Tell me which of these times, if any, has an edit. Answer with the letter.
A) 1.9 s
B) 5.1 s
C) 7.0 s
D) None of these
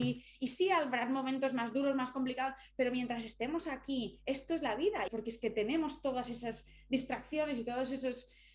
B